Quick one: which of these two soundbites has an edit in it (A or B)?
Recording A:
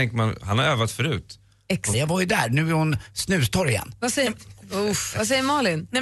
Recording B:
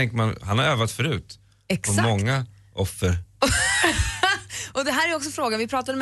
A